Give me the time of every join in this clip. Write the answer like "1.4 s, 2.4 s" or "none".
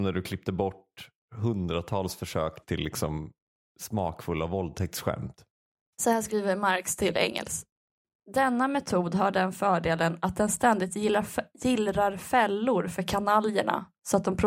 2.6 s, 5.9 s